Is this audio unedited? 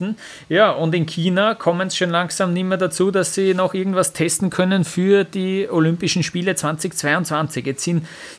yes; 0 cuts

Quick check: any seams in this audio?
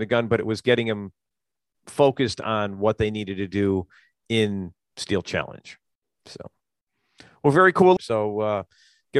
yes; 2 cuts; at 6.1 s, 8.0 s

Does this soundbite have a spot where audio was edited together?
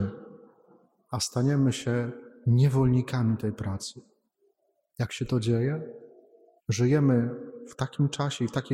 yes; 1 cut; at 6.6 s

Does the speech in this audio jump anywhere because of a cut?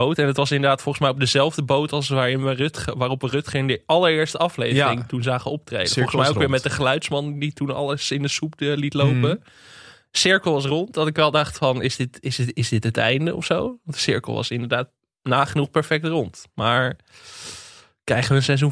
no; 0 cuts

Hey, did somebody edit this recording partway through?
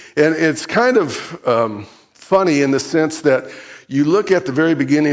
no; 0 cuts

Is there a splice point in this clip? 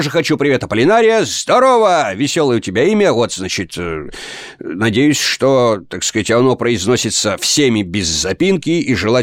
no; 0 cuts

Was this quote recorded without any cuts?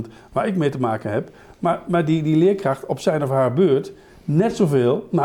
yes; 0 cuts

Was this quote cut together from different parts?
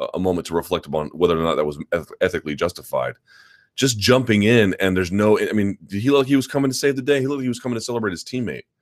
no; 0 cuts

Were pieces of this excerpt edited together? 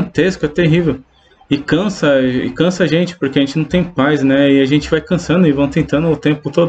no; 0 cuts

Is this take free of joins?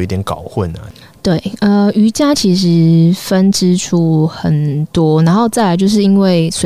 yes; 0 cuts

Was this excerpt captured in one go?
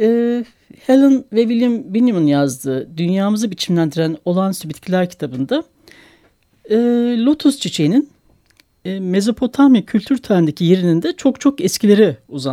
yes; 0 cuts

